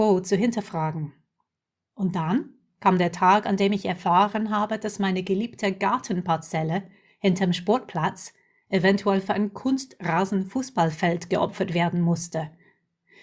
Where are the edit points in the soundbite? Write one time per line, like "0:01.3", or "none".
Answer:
none